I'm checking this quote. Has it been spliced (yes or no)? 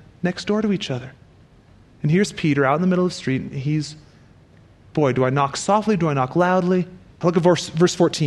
yes